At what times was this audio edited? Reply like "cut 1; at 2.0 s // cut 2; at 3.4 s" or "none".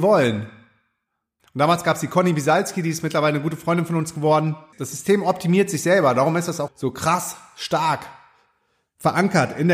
cut 1; at 1.4 s // cut 2; at 4.7 s // cut 3; at 6.7 s